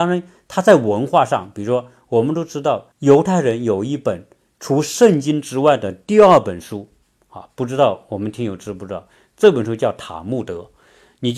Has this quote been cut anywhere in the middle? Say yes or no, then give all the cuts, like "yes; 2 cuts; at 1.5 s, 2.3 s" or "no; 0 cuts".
yes; 1 cut; at 2.9 s